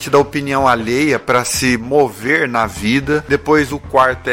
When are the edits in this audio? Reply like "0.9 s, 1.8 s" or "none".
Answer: none